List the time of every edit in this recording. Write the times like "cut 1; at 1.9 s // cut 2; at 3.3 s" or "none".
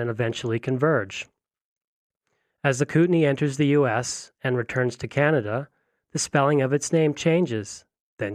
none